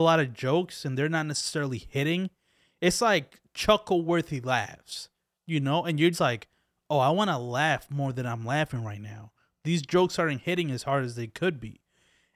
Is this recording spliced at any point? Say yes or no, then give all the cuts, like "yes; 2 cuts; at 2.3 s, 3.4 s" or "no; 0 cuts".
yes; 1 cut; at 6.1 s